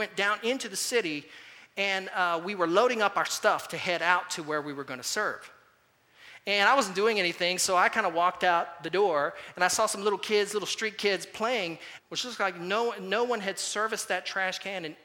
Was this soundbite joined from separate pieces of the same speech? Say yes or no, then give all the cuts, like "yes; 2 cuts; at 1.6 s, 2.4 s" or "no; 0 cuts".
yes; 1 cut; at 12.0 s